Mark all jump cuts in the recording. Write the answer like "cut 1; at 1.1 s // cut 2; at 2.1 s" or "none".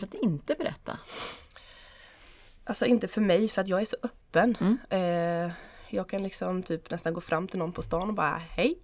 none